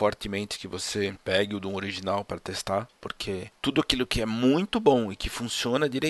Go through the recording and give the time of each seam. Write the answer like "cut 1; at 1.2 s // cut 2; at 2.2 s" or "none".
cut 1; at 3.0 s